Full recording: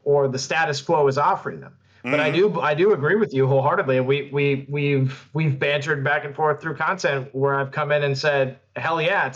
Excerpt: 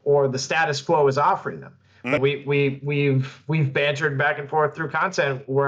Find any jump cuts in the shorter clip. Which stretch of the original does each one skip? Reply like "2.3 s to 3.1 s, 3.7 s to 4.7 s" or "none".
2.2 s to 4.0 s